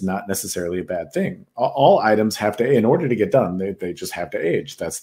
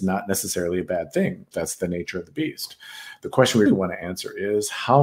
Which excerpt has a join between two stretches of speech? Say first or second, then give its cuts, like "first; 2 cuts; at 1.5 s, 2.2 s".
second; 2 cuts; at 1.5 s, 3.6 s